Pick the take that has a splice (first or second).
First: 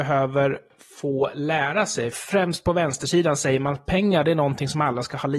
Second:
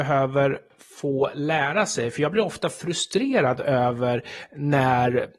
first